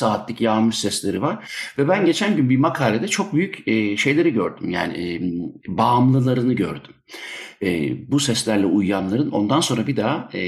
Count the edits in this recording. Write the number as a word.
zero